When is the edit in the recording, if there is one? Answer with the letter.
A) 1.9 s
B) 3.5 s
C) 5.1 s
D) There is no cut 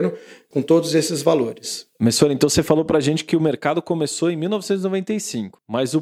A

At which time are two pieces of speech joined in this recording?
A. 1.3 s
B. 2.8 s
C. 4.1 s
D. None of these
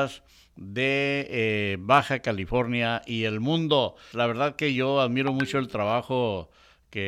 C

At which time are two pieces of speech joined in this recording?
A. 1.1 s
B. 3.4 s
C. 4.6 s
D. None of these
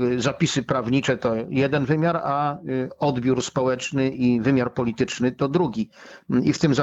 D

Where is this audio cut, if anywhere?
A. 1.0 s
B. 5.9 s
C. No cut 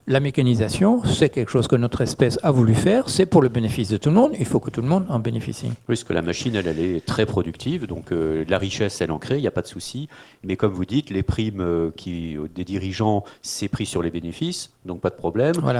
C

